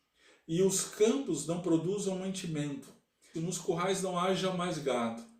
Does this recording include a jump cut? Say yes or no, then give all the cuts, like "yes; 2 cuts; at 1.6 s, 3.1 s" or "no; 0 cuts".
yes; 1 cut; at 3.3 s